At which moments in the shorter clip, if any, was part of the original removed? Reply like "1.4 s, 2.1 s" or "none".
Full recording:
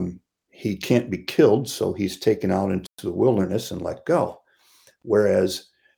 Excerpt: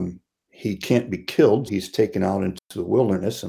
1.7 s